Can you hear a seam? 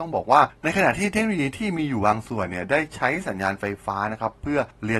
no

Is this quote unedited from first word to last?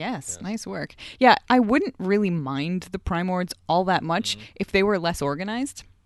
no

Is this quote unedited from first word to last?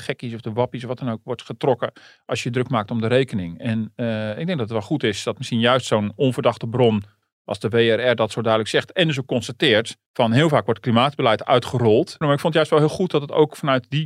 no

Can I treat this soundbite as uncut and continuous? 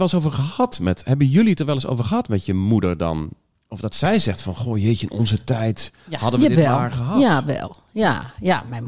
yes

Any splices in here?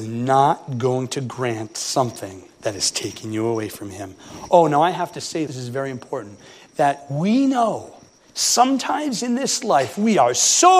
yes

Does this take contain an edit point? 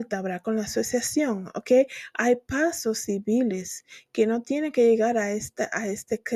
no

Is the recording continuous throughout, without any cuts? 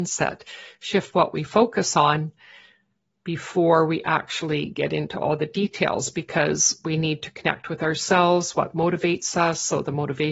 yes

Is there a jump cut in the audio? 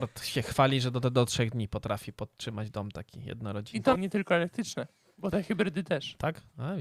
yes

